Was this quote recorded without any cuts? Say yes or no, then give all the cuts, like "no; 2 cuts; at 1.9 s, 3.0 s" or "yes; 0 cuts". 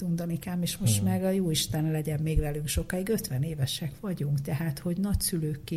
yes; 0 cuts